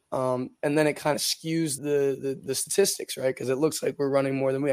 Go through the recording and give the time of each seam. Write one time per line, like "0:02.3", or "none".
0:01.8

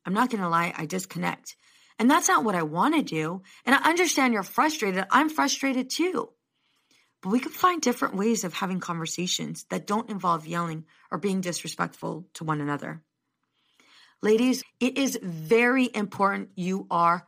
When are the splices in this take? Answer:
0:14.6

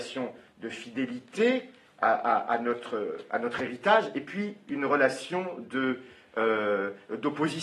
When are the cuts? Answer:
none

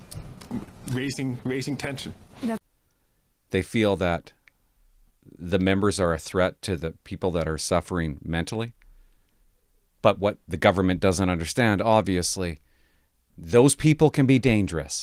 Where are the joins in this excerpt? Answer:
none

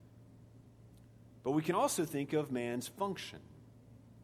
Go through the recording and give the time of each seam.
none

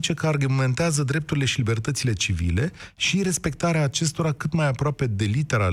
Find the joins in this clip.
none

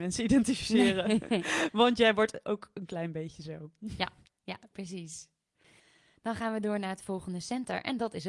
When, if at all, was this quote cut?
none

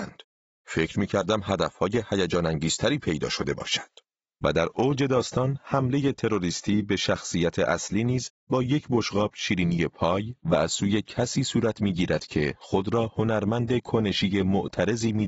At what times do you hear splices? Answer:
0:04.3

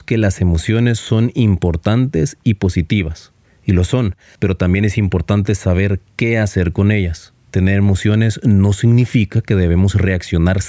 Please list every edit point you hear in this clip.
0:04.4

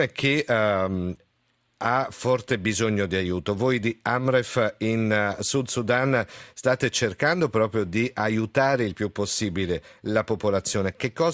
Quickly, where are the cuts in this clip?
none

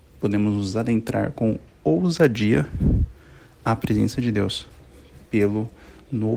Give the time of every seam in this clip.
none

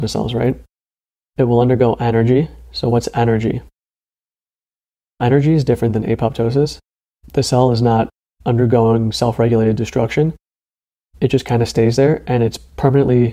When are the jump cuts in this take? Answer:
none

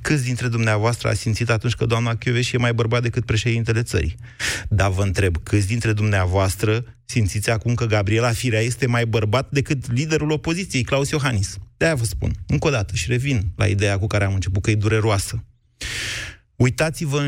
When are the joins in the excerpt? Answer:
0:11.8

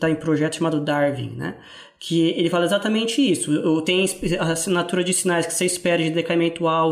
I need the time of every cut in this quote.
none

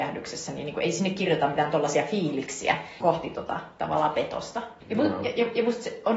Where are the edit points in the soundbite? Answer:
0:03.0
0:04.8

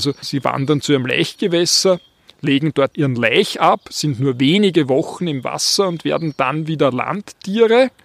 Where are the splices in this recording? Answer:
none

